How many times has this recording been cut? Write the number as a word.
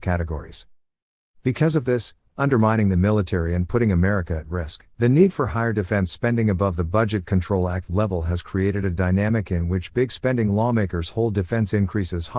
two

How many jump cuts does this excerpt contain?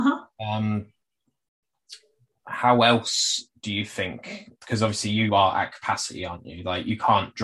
zero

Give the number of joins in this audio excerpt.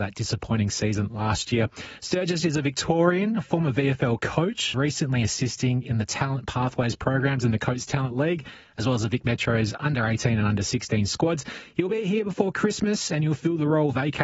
one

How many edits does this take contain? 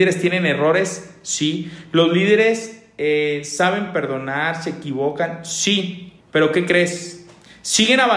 one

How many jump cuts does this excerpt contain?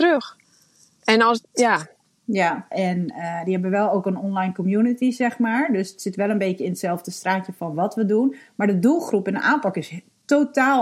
one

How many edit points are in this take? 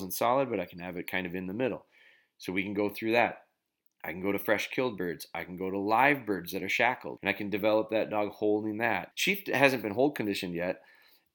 two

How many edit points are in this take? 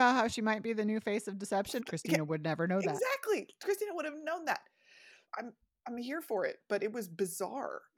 two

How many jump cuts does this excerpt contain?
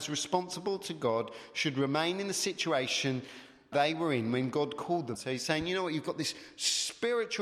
two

